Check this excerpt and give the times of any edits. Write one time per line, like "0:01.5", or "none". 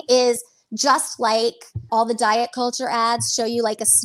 0:01.9